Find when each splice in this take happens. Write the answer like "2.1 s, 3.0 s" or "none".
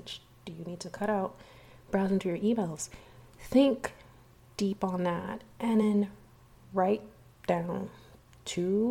none